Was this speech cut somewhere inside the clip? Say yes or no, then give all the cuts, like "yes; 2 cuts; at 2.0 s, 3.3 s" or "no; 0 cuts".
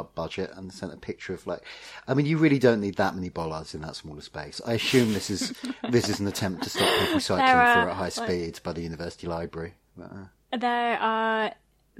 no; 0 cuts